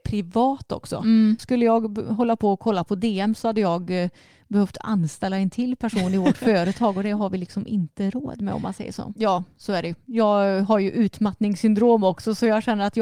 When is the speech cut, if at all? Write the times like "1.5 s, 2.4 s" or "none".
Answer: 1.4 s, 9.2 s